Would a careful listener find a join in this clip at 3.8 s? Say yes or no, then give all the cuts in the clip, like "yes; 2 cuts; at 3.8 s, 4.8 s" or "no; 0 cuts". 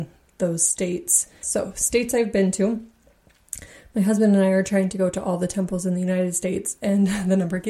no; 1 cut; at 1.4 s